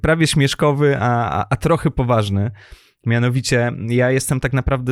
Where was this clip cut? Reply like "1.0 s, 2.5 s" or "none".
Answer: none